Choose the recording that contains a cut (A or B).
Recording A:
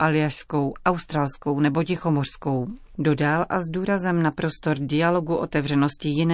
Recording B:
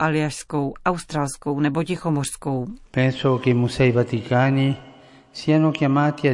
B